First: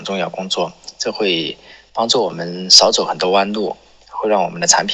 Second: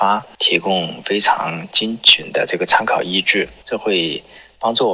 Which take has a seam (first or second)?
second